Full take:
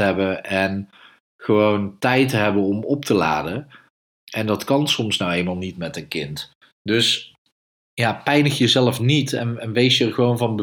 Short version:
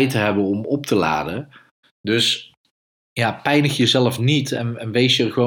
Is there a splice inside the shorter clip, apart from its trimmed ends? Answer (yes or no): yes